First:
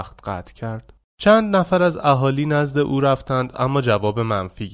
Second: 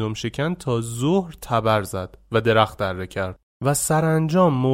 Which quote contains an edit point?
first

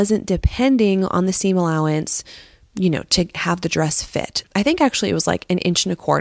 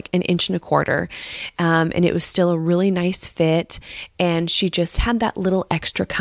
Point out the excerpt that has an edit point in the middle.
first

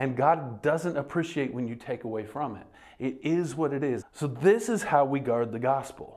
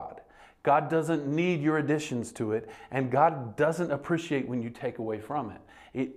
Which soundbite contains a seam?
first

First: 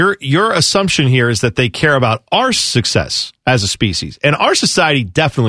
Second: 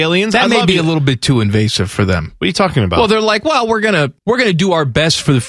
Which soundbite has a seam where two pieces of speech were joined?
second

